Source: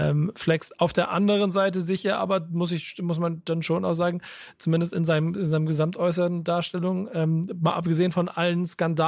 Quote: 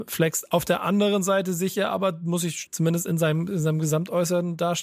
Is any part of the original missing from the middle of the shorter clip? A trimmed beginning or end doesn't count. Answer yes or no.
yes